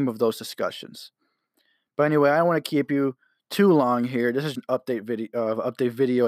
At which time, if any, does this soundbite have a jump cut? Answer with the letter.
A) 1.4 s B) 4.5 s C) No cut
B